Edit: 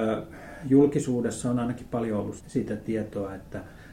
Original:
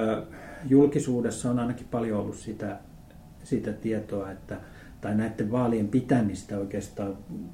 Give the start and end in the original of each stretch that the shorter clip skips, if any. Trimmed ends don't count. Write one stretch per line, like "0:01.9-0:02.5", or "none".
0:02.4-0:03.3